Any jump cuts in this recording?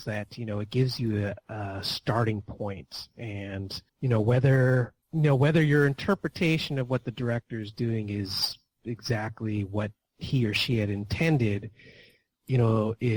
yes; 2 cuts; at 3.9 s, 5.0 s

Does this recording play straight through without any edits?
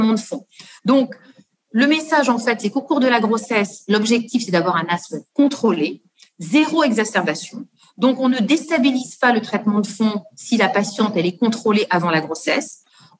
yes; 0 cuts

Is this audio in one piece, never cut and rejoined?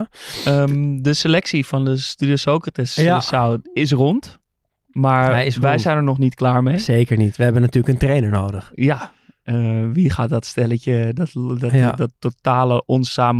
yes; 0 cuts

